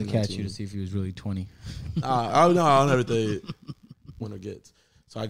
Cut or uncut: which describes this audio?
cut